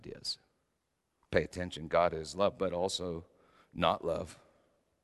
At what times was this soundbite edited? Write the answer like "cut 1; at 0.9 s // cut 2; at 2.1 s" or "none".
cut 1; at 1.2 s